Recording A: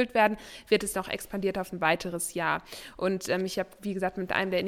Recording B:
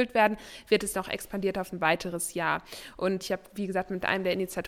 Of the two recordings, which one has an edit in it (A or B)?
B